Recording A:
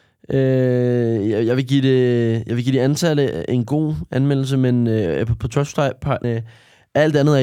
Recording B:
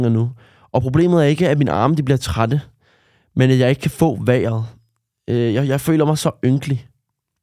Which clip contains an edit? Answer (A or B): A